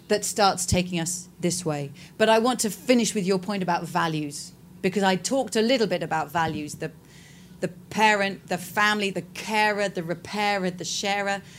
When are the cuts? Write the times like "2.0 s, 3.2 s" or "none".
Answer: 9.1 s